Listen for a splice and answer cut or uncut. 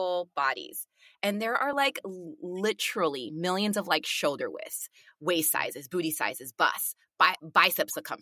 uncut